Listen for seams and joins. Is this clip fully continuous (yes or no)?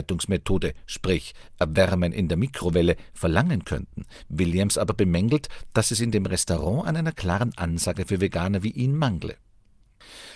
yes